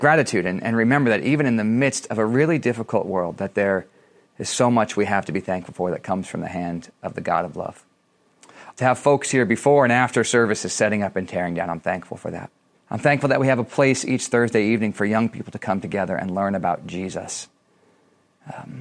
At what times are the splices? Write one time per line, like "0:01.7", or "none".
0:08.7
0:12.7